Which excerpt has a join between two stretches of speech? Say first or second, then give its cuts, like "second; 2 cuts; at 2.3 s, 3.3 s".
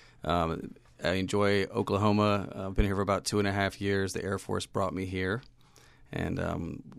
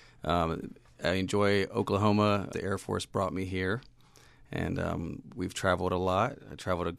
second; 1 cut; at 2.5 s